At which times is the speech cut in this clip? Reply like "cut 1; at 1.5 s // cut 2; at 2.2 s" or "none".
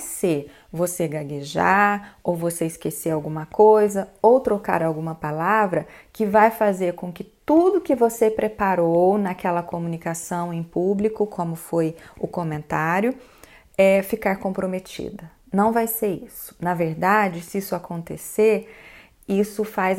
none